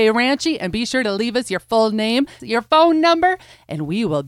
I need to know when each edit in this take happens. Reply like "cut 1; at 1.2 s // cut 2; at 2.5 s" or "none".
cut 1; at 2.4 s